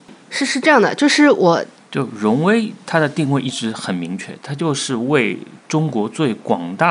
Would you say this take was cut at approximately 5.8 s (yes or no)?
no